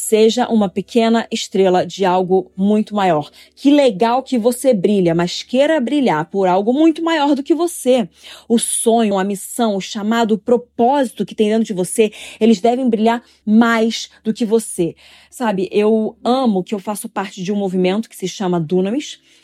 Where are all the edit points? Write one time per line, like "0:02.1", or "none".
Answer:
0:09.1
0:13.4